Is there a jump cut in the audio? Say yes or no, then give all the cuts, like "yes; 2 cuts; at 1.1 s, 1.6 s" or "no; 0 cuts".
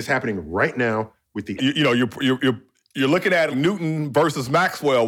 yes; 2 cuts; at 1.6 s, 3.5 s